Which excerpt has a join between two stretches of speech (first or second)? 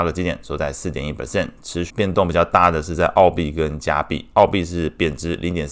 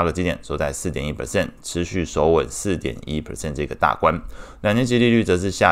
first